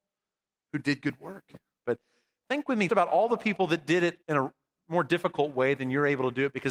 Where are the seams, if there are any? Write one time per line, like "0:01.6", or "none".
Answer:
0:01.8
0:02.9
0:04.2